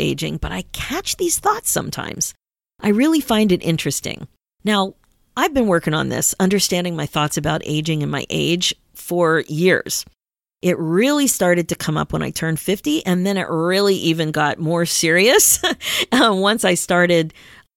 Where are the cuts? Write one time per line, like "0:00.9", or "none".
none